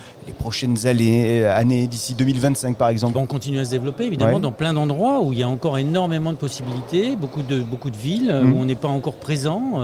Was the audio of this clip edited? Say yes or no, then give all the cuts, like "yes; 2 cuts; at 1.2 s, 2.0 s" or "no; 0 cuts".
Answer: yes; 1 cut; at 3.1 s